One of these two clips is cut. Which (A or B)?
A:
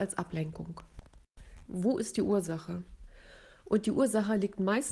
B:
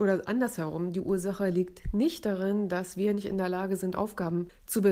A